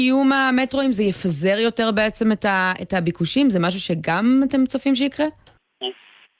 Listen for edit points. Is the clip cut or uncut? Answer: uncut